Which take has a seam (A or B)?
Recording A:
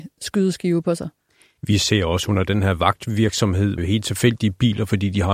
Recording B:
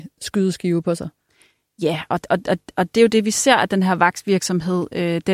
A